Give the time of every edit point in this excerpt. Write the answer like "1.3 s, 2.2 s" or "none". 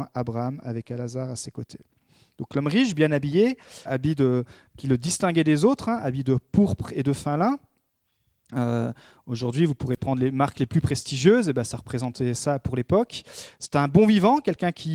3.9 s